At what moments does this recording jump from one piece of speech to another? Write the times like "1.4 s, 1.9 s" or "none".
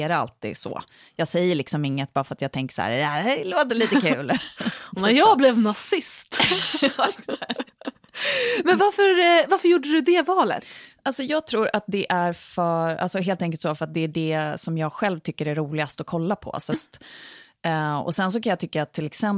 16.7 s